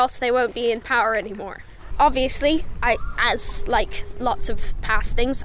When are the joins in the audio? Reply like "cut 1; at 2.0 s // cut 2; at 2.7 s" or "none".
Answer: cut 1; at 1.9 s